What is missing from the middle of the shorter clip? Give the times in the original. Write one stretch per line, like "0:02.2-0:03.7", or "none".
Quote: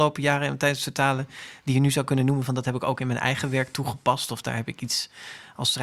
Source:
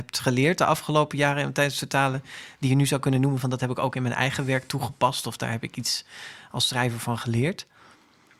none